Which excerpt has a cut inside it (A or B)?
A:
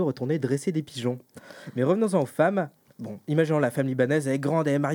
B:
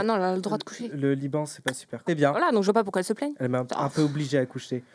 B